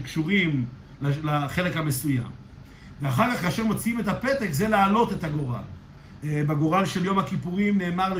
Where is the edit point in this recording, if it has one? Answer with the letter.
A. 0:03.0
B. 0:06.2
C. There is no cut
B